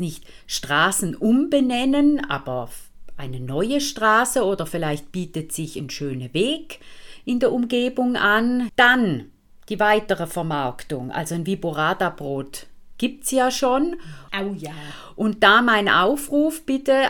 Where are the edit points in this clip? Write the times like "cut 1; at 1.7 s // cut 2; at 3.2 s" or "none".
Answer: cut 1; at 8.7 s // cut 2; at 14.3 s